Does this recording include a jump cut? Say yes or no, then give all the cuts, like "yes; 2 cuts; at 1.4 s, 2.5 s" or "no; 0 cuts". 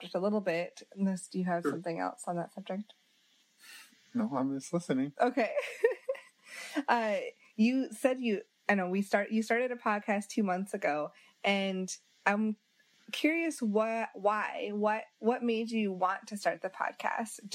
no; 0 cuts